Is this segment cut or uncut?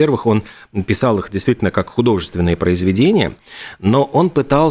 uncut